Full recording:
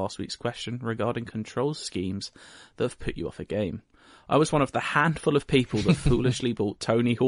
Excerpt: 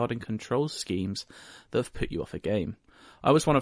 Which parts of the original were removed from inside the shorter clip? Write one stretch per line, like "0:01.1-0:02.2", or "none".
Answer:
none

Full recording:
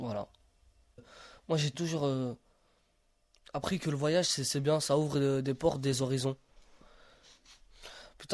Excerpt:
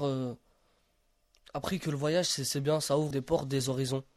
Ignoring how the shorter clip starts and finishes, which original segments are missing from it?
0:05.1-0:05.4

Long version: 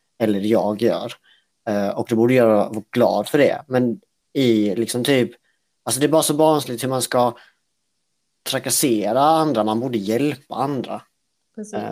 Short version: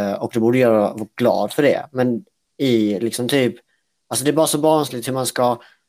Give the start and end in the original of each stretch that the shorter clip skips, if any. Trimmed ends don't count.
none

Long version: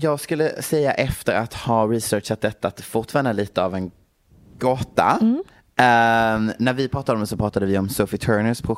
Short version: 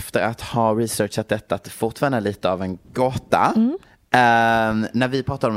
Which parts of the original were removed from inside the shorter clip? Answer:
0:04.0-0:04.5

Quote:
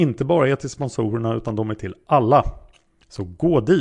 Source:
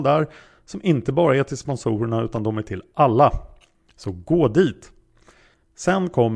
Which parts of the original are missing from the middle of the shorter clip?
none

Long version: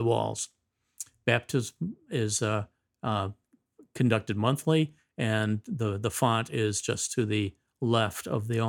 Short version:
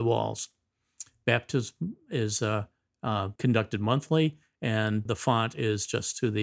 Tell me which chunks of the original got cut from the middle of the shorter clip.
0:03.4-0:03.9
0:05.6-0:06.0

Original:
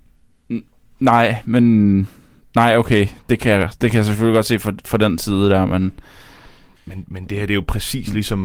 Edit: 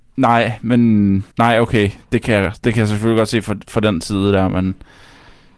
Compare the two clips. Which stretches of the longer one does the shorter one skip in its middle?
0:02.1-0:02.5

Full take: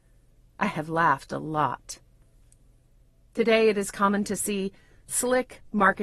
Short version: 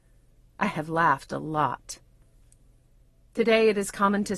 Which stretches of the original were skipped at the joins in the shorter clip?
none

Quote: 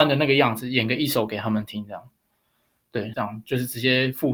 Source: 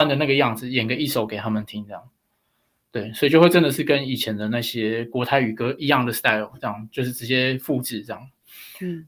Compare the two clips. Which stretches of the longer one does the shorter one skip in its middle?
0:03.1-0:06.6

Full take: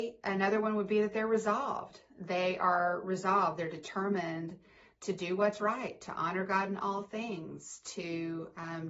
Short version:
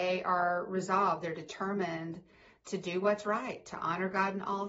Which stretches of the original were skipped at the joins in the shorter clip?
none

